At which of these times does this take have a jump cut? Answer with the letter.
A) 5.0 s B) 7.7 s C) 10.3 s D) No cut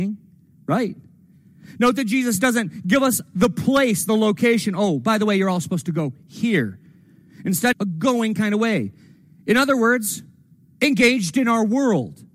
B